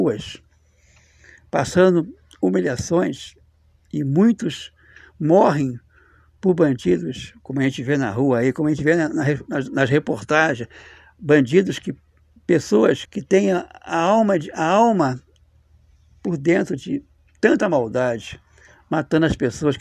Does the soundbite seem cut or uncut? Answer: cut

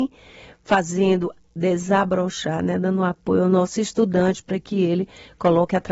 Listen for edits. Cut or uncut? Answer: uncut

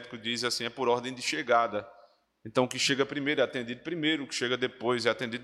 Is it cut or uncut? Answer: uncut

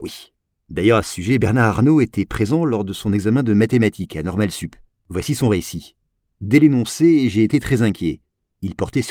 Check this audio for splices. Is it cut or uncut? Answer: uncut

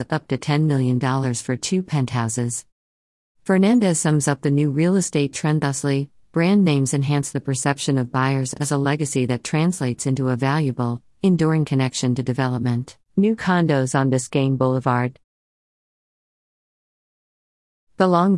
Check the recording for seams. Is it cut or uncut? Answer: uncut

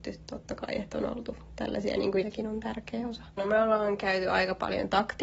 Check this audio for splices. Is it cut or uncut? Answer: cut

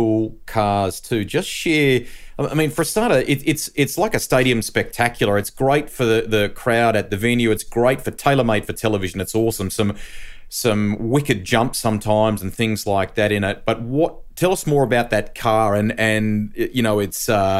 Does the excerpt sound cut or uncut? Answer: uncut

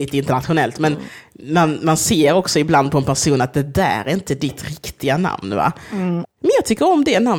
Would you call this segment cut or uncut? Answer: cut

